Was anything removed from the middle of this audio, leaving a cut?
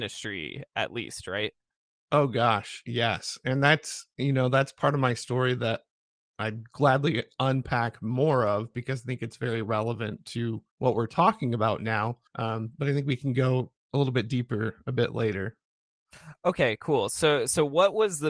yes; 2 cuts; at 10.7 s, 12.3 s

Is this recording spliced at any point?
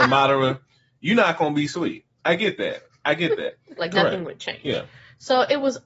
yes; 1 cut; at 3.8 s

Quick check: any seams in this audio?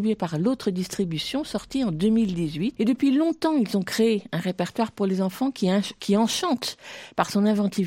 yes; 1 cut; at 2.8 s

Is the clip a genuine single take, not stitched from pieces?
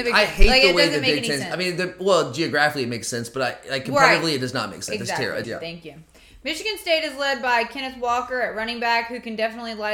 no; 1 cut; at 5.4 s

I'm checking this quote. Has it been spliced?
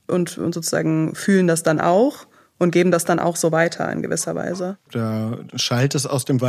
yes; 1 cut; at 4.9 s

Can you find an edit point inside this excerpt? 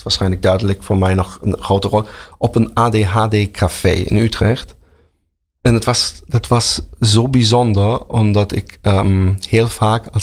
no; 0 cuts

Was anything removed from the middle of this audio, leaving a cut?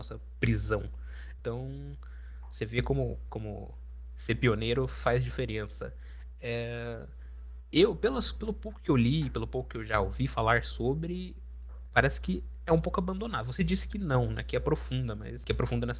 yes; 3 cuts; at 1.4 s, 3.3 s, 11.9 s

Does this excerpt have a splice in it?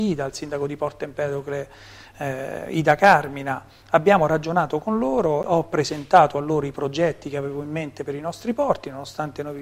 no; 0 cuts

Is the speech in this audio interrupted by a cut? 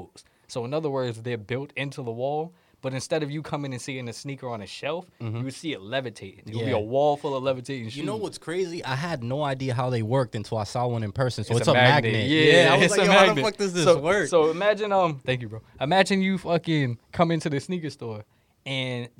no; 0 cuts

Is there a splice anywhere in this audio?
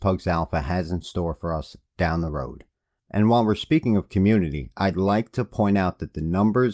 yes; 1 cut; at 3.0 s

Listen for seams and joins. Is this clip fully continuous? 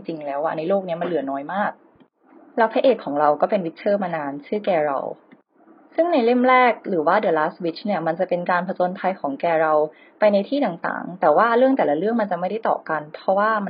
yes; 0 cuts

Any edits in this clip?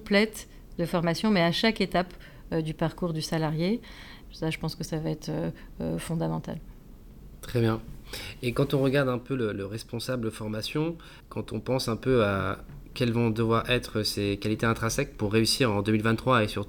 yes; 2 cuts; at 4.2 s, 11.2 s

